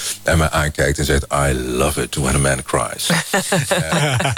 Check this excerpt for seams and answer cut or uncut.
uncut